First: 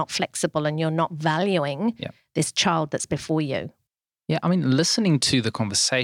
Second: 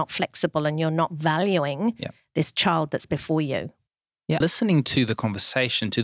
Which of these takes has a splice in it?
second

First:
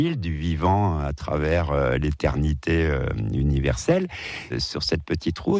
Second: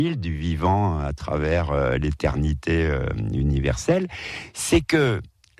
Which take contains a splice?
first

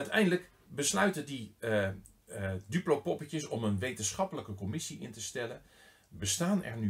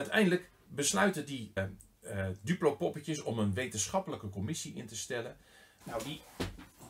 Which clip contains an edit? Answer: second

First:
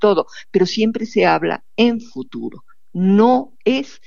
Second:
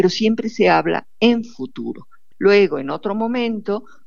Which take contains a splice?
second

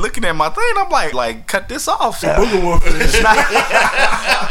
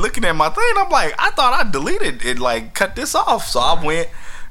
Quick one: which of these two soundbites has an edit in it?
first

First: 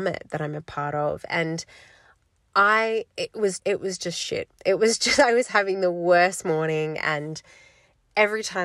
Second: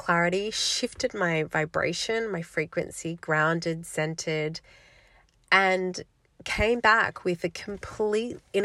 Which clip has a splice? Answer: first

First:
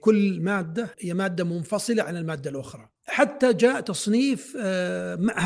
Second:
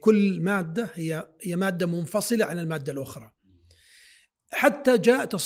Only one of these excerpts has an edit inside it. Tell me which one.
first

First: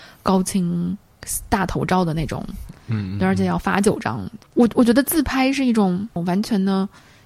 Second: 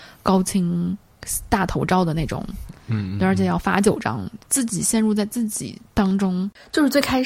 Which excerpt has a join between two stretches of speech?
second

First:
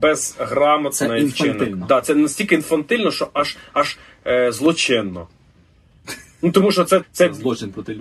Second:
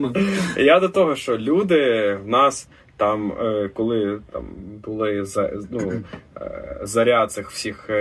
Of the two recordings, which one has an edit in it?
first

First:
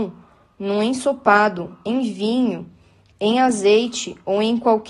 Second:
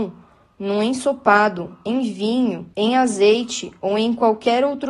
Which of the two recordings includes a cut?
second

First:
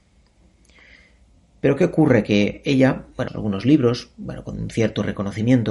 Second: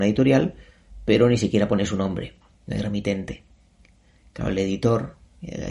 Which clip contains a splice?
first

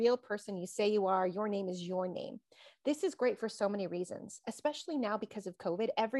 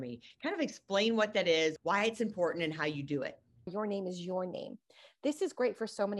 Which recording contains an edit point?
second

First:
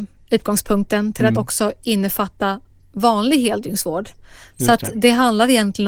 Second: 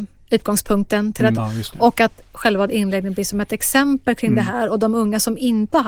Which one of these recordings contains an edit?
second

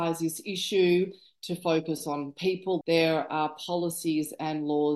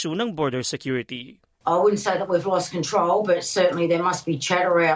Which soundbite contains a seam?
first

